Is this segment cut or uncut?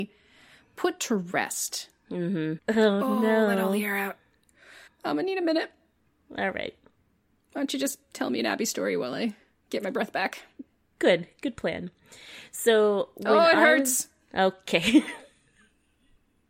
cut